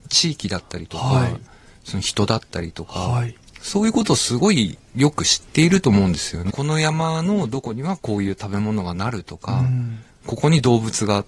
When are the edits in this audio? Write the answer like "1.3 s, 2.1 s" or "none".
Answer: 6.5 s